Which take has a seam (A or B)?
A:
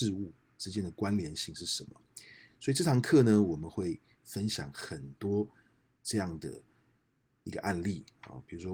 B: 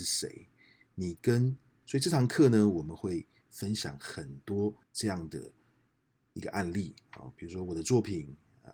B